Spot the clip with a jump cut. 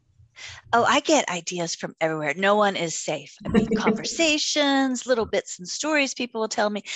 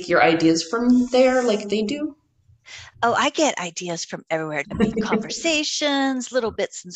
second; 1 cut; at 4.6 s

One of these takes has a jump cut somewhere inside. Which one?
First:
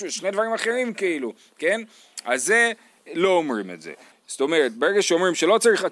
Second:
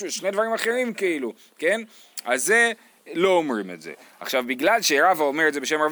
first; 1 cut; at 4.1 s

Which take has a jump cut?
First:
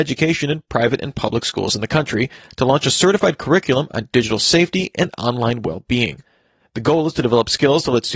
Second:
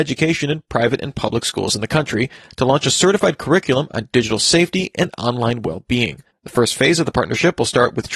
second; 1 cut; at 6.3 s

